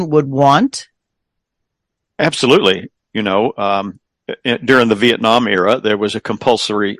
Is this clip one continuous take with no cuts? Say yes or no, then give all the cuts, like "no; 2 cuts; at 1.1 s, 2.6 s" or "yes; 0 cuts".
no; 1 cut; at 3.0 s